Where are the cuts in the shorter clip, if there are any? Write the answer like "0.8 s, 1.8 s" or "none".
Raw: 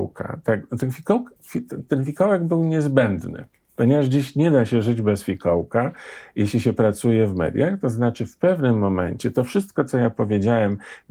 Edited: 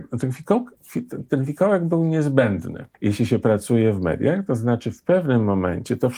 2.9 s